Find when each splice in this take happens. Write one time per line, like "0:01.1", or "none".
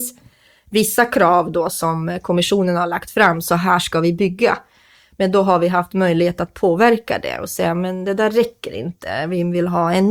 none